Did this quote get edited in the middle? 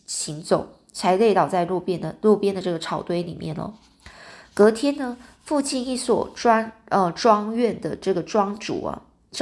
no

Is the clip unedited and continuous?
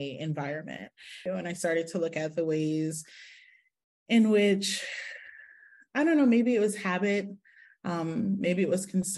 no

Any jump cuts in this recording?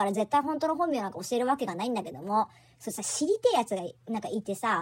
no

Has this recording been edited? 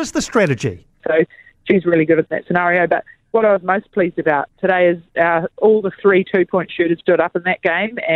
yes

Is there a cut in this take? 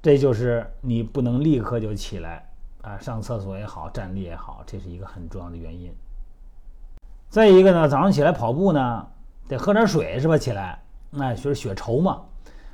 no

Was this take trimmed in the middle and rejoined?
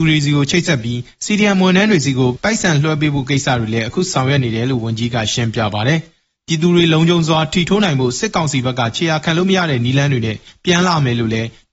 no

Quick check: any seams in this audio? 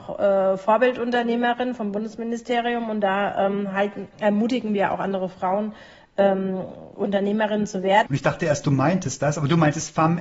yes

